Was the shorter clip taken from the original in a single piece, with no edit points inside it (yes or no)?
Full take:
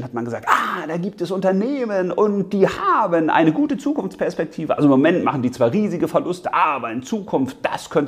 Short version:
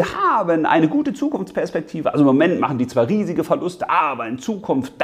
yes